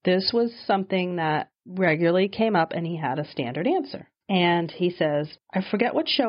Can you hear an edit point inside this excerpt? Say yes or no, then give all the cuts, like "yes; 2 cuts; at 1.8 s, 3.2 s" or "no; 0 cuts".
no; 0 cuts